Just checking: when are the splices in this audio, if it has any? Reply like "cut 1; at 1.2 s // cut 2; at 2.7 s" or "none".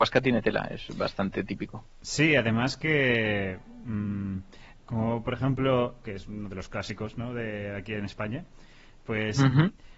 cut 1; at 4.7 s // cut 2; at 6.0 s